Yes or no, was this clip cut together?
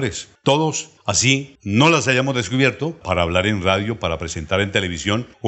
yes